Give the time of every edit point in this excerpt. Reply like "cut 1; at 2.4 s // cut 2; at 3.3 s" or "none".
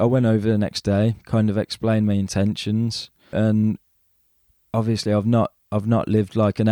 cut 1; at 3.3 s